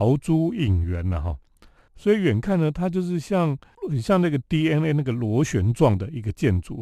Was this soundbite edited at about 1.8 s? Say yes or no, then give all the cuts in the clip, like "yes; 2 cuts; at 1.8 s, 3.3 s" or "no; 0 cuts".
yes; 1 cut; at 1.8 s